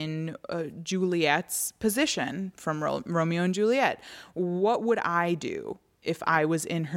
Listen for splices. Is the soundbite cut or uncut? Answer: uncut